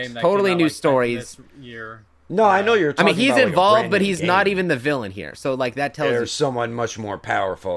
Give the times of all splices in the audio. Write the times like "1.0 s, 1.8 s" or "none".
none